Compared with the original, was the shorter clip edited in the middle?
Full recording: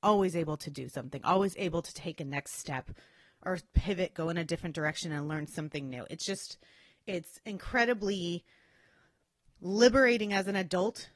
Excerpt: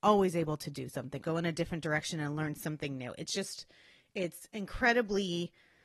yes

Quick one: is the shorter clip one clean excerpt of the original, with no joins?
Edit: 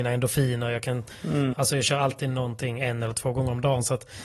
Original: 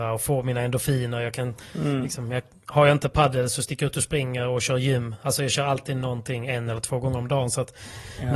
no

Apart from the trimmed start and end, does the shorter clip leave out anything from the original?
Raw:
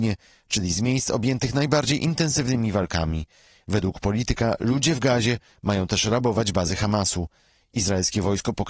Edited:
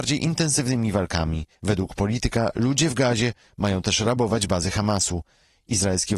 yes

